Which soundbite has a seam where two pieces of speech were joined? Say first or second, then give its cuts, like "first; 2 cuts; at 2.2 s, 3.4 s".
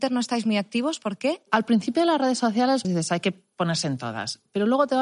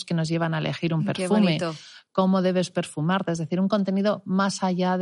first; 1 cut; at 2.8 s